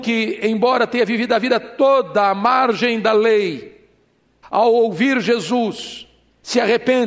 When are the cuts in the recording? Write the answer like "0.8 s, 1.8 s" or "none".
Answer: 4.4 s